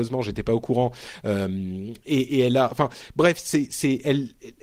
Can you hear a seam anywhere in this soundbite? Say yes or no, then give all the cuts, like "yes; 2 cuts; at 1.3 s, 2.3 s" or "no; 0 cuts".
no; 0 cuts